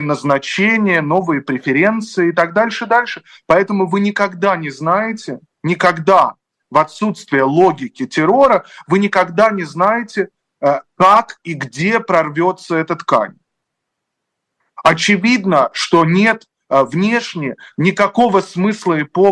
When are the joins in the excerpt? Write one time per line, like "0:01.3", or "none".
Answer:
none